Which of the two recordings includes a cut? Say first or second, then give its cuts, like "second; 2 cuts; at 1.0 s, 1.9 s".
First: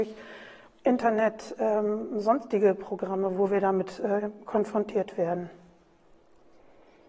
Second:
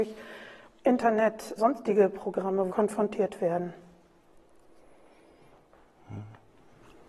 second; 2 cuts; at 1.6 s, 2.7 s